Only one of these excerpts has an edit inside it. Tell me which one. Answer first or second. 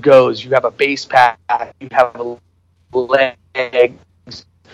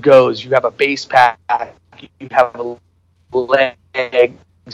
first